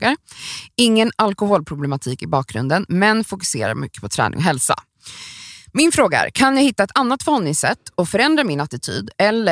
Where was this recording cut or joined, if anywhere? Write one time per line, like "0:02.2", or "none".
none